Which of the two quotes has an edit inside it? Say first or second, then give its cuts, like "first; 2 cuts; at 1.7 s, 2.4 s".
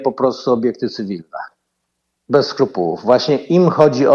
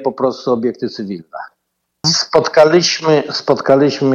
second; 1 cut; at 2.0 s